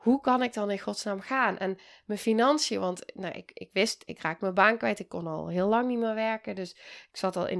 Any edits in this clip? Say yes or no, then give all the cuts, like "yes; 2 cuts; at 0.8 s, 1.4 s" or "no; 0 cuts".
no; 0 cuts